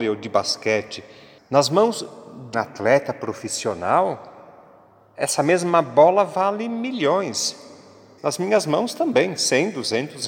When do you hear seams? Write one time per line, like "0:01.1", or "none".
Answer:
0:01.4
0:02.5
0:08.2